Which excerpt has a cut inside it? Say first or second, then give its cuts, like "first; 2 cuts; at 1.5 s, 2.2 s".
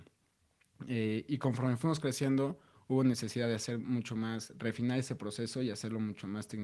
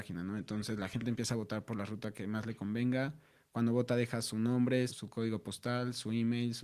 second; 1 cut; at 4.9 s